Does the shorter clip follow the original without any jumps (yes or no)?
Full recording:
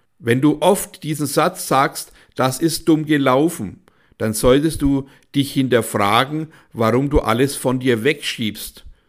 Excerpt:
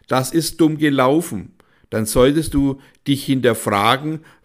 yes